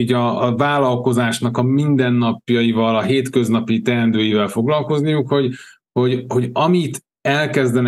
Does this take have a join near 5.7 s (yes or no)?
no